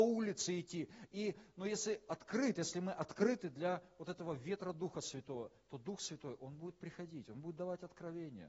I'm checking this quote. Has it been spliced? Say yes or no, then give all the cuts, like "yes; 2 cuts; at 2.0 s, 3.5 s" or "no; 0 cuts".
no; 0 cuts